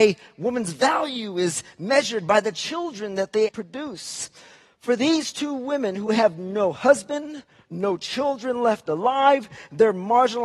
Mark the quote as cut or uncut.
cut